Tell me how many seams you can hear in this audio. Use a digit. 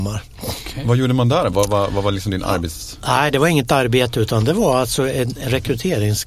0